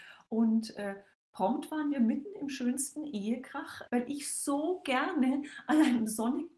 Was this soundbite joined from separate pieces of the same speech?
yes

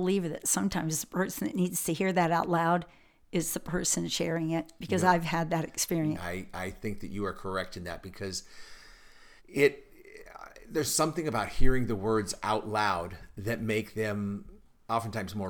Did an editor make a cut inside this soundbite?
yes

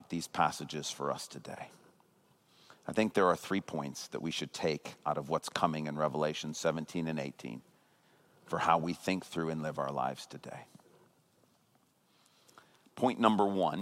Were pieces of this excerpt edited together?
no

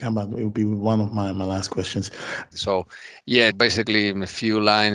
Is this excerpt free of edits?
no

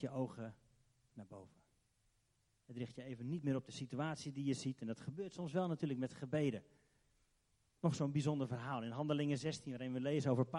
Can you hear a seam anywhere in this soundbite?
yes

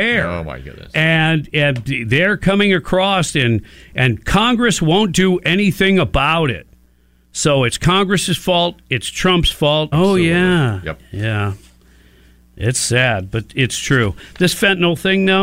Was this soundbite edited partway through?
yes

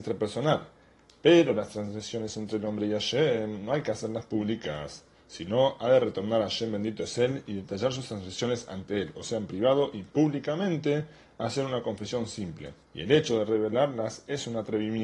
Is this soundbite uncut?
no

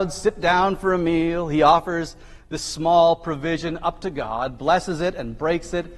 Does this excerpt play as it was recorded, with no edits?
yes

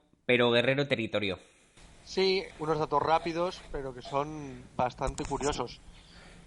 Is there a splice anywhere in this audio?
yes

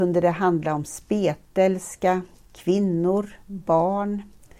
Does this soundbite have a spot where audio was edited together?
no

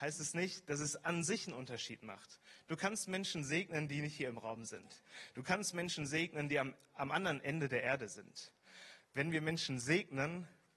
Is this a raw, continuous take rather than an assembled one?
no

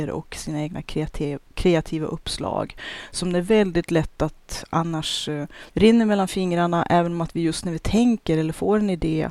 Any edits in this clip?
yes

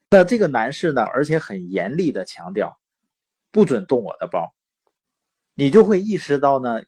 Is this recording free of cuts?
no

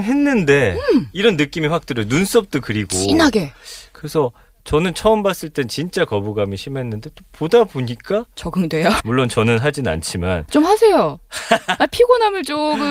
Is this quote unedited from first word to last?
no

